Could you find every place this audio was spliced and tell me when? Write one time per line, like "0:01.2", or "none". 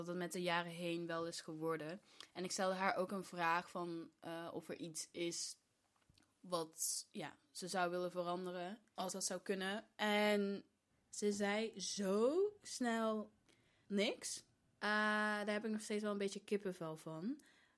none